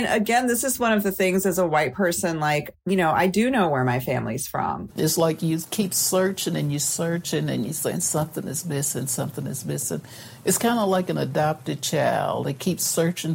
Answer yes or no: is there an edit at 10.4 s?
no